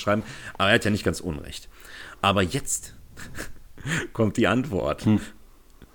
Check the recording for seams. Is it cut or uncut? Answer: uncut